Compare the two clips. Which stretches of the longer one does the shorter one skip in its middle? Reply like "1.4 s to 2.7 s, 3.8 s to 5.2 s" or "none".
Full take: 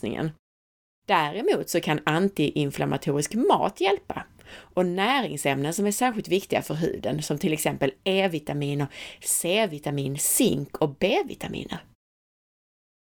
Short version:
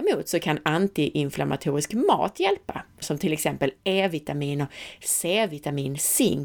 4.4 s to 7.2 s